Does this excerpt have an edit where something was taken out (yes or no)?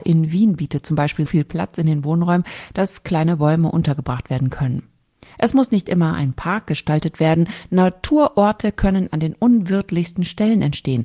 yes